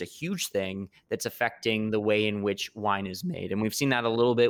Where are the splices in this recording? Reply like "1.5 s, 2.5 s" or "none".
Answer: none